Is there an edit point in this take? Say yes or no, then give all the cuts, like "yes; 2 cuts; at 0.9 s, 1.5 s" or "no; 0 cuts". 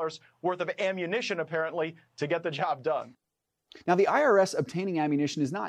yes; 1 cut; at 3.8 s